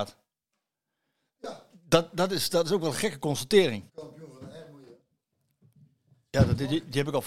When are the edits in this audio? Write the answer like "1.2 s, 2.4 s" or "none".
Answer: 3.9 s